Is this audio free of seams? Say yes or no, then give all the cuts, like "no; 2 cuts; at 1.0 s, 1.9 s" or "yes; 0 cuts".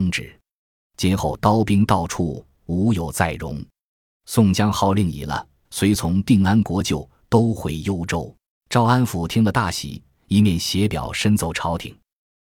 no; 2 cuts; at 5.6 s, 8.5 s